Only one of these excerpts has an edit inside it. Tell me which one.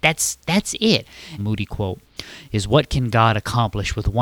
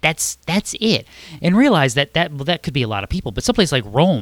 first; 1 cut; at 1.4 s

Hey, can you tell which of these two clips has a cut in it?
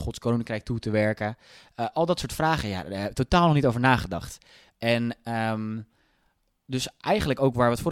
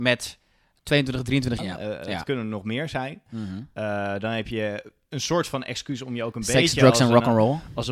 second; 1 cut; at 1.6 s

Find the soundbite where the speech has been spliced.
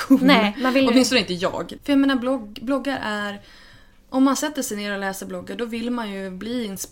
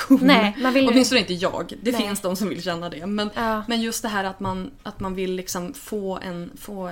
first; 1 cut; at 1.8 s

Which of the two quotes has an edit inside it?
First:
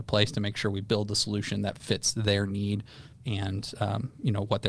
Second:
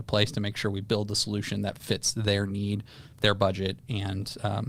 first; 1 cut; at 3.2 s

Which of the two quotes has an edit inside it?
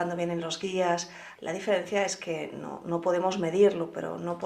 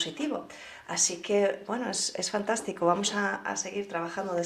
first; 1 cut; at 1.4 s

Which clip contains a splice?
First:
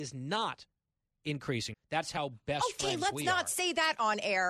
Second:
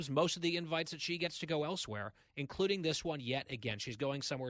first; 1 cut; at 1.7 s

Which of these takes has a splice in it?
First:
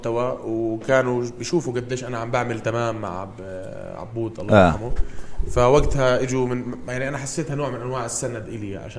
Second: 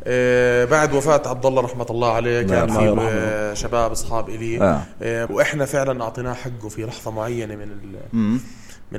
second; 1 cut; at 5.3 s

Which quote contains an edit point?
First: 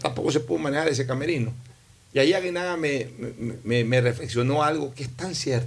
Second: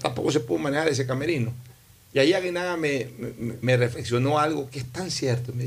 second; 1 cut; at 3.6 s

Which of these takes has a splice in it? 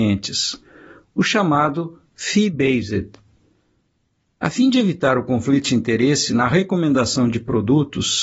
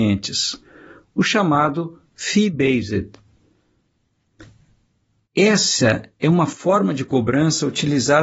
first; 1 cut; at 4.3 s

